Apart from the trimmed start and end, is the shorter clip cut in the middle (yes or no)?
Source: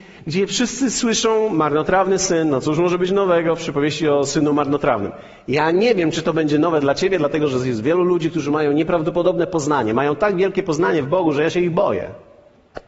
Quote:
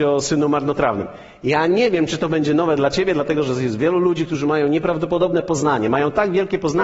no